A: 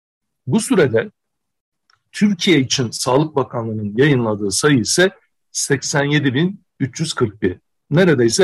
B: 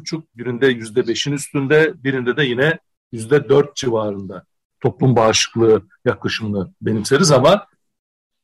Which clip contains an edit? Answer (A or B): B